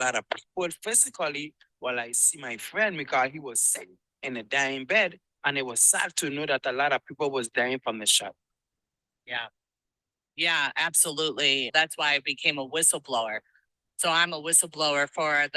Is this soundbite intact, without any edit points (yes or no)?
no